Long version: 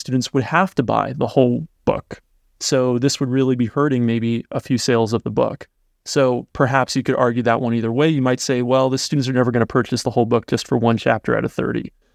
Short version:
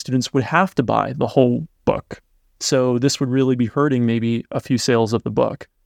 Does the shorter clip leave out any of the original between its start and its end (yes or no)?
no